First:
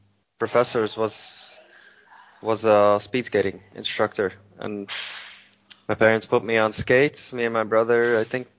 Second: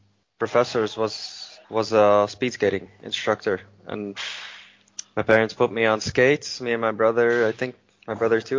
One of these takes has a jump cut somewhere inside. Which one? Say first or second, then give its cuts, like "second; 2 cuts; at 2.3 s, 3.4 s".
second; 1 cut; at 1.6 s